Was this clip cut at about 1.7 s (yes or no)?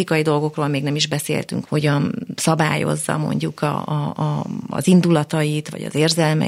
yes